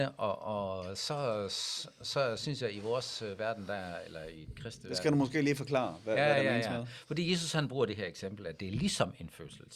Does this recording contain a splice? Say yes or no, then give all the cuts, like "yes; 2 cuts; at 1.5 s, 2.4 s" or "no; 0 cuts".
no; 0 cuts